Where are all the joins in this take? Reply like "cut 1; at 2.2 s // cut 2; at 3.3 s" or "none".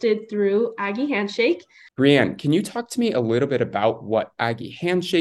cut 1; at 1.9 s

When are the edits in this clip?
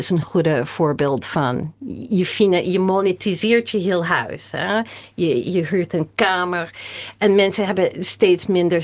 none

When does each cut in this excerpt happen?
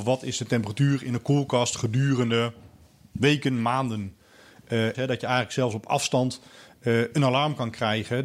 cut 1; at 4.9 s

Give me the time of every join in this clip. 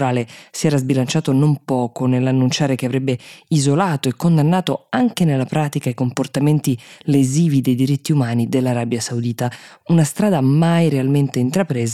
none

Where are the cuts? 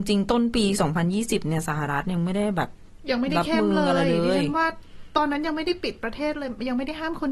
none

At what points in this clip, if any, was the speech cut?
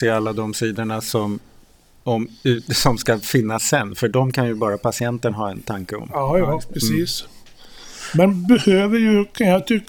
none

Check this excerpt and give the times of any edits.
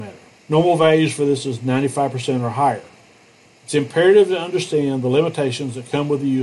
cut 1; at 3.5 s

